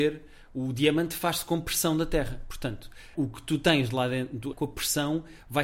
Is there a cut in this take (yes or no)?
yes